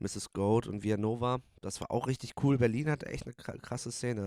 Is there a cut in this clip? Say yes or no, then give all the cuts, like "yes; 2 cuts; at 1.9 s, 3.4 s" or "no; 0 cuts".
no; 0 cuts